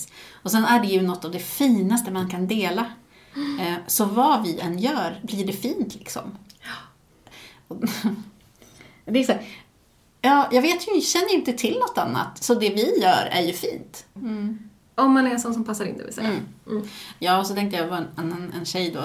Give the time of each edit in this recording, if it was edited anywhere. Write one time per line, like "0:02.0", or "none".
0:14.2